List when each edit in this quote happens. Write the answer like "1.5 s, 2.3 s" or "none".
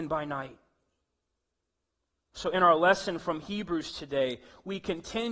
2.3 s